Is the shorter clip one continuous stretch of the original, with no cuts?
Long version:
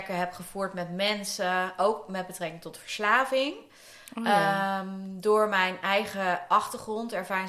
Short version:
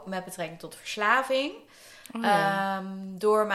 yes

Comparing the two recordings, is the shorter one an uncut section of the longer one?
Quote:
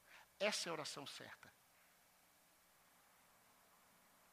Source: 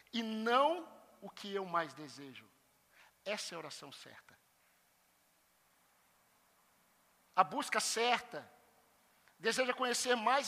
yes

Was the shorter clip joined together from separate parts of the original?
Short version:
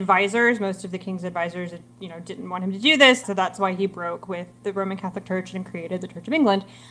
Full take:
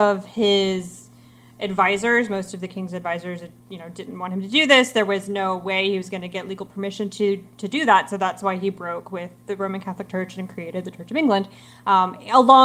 yes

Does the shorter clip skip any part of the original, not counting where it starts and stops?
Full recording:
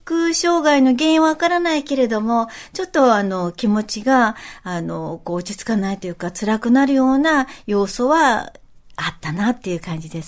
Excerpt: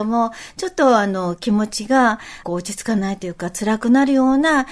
yes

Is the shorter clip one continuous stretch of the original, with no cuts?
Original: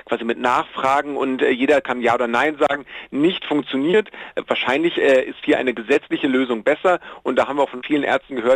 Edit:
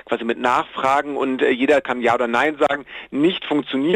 yes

